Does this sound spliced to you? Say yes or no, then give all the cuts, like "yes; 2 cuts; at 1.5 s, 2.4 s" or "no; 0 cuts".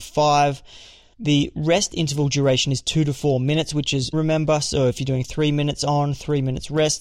yes; 1 cut; at 4.1 s